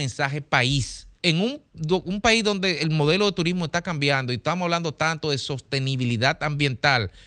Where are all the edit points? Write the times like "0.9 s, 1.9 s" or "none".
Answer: 1.2 s